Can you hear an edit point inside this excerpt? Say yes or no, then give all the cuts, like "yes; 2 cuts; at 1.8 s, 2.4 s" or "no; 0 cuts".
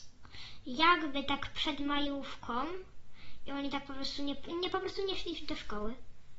yes; 1 cut; at 4.5 s